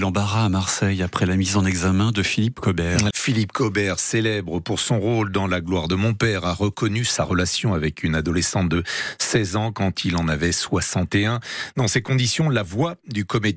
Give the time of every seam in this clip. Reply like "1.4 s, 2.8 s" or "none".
3.1 s